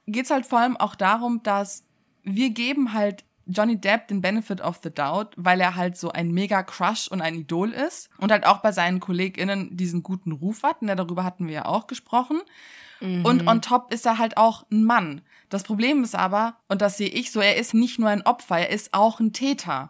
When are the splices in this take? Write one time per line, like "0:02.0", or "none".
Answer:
0:16.6
0:17.7